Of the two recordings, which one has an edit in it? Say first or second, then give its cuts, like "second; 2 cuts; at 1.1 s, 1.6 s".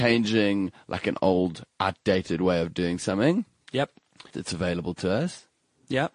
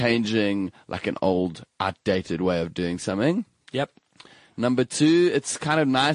first; 1 cut; at 4.3 s